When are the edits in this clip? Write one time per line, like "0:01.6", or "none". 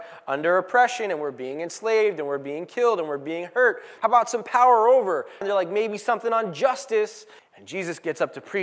0:04.0
0:05.4
0:07.4